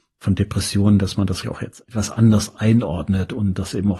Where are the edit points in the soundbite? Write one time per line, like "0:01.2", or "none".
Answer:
0:01.4

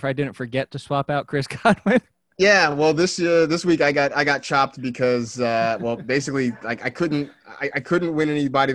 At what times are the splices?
none

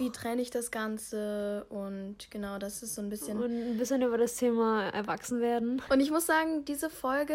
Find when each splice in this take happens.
0:05.9

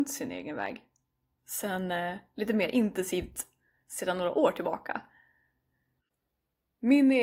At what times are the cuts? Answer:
0:01.4
0:06.0

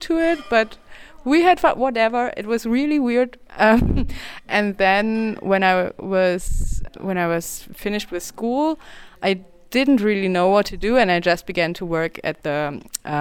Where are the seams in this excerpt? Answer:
0:03.5
0:06.9

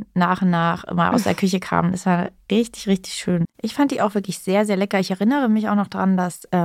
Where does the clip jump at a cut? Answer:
0:03.4

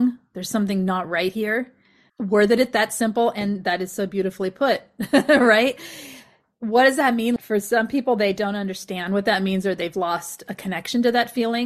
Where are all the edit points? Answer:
0:02.1
0:07.4

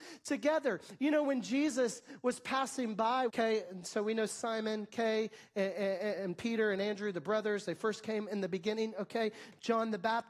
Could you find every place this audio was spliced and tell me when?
0:03.3

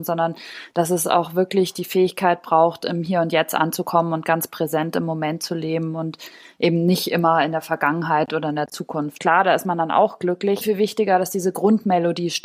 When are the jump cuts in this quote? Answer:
0:09.2
0:10.6

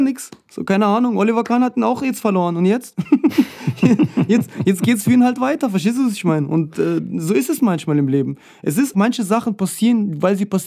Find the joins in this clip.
0:08.9

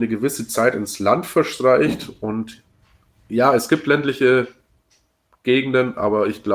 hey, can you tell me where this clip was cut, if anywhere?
none

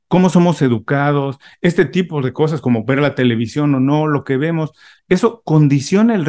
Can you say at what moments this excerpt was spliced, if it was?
0:05.0

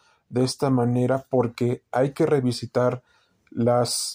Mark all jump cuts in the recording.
none

